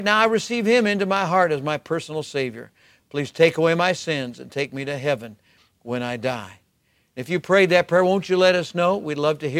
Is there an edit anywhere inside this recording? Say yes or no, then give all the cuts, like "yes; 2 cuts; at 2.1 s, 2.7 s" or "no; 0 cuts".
no; 0 cuts